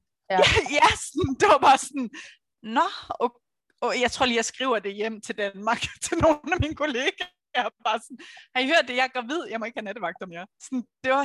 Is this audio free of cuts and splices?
yes; 0 cuts

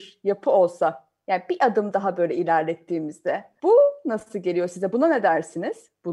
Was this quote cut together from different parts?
no; 0 cuts

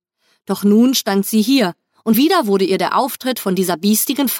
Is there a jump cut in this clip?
yes; 1 cut; at 2.1 s

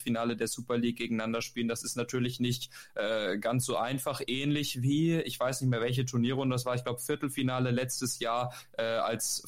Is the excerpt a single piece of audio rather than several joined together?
yes; 0 cuts

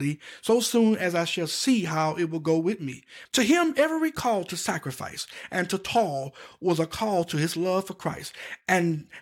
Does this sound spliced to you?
yes; 1 cut; at 3.3 s

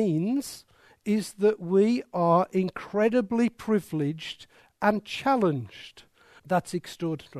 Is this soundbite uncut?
no; 1 cut; at 6.4 s

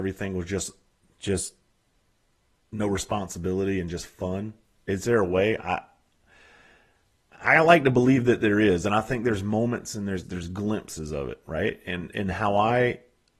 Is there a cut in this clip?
yes; 1 cut; at 10.2 s

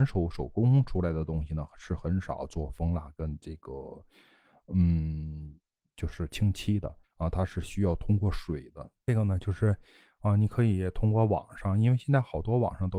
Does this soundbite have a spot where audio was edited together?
yes; 2 cuts; at 7.0 s, 9.0 s

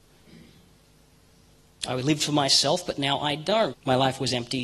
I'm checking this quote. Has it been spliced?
yes; 1 cut; at 3.7 s

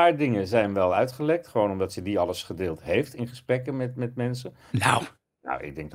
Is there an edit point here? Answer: yes; 1 cut; at 4.7 s

